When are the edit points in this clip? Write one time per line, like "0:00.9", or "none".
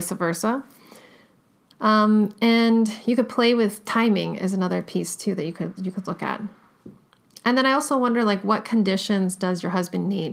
none